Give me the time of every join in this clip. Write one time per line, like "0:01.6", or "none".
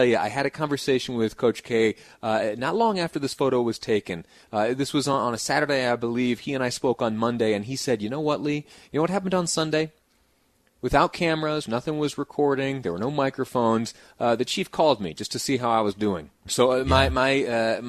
0:11.7
0:16.5